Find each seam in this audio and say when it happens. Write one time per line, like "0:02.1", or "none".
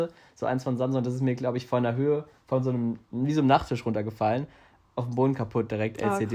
0:03.0